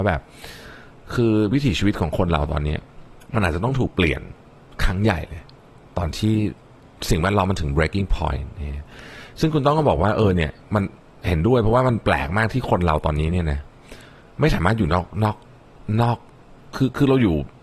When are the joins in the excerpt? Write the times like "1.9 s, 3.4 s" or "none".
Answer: 3.2 s